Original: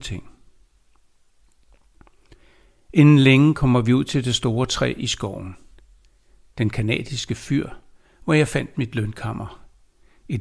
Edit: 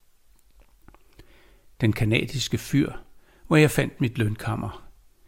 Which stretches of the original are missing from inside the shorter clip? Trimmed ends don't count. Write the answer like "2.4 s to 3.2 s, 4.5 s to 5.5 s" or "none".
2.8 s to 6.4 s